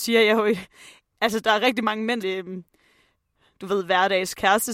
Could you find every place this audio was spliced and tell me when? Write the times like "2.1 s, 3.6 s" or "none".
2.2 s

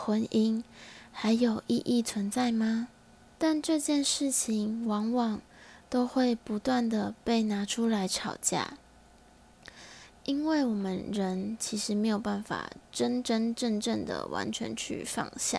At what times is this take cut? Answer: 3.4 s

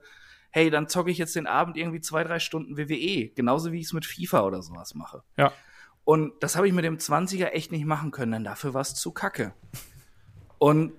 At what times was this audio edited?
none

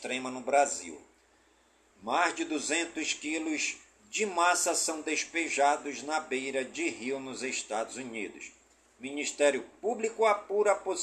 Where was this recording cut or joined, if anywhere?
1.9 s

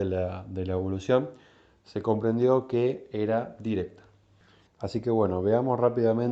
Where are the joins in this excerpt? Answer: 4.7 s

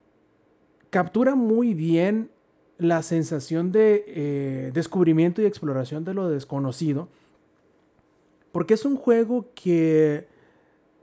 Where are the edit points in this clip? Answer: none

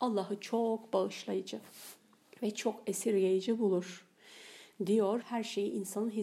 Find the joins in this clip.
5.2 s

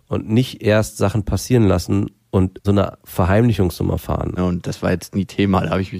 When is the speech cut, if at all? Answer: 2.6 s, 4.4 s

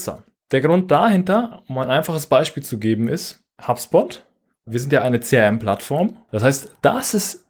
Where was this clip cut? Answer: 6.3 s

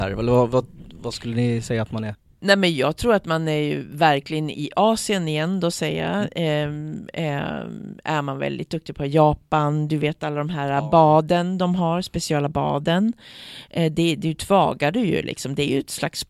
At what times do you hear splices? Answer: 4.5 s

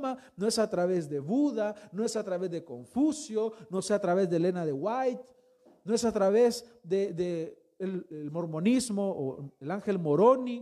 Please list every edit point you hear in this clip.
none

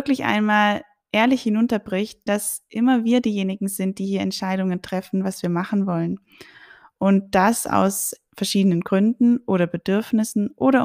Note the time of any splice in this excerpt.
2.3 s

